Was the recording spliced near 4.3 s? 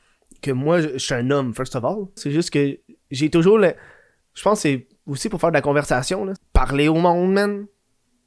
no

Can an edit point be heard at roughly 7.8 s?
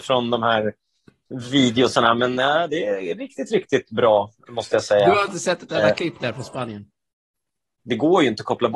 yes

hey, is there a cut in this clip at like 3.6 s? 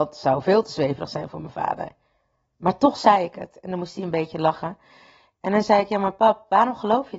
no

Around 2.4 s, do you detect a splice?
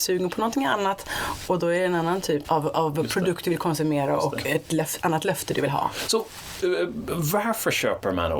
yes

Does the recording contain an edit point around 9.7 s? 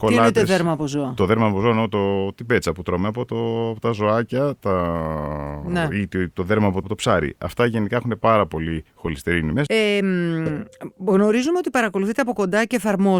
yes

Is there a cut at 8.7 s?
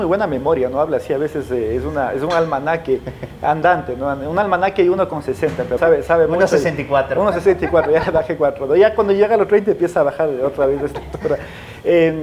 no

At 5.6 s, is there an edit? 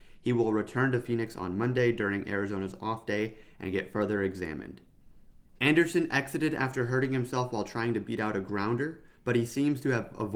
yes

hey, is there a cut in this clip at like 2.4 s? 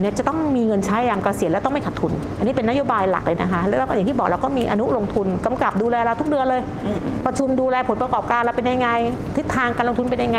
yes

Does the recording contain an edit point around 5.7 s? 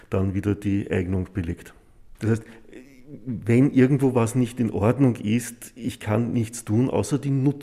no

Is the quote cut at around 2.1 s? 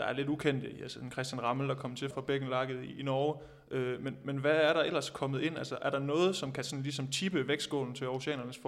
yes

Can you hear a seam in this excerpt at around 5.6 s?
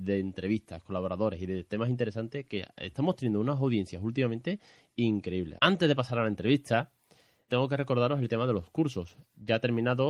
yes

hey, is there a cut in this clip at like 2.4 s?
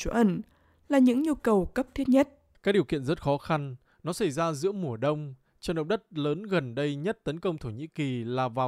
no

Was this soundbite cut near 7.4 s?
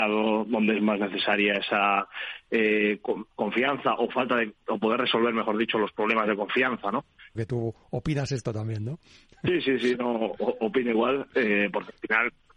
yes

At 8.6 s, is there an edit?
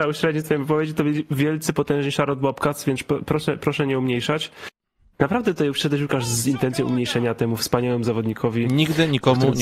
no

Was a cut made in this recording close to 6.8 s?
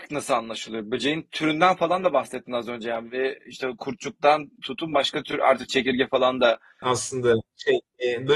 yes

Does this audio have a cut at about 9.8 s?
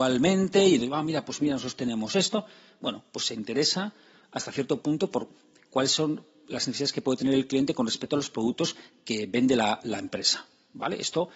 no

